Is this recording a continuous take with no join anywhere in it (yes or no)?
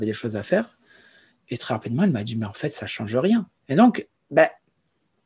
no